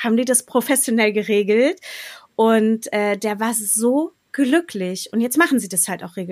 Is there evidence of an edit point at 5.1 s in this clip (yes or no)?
no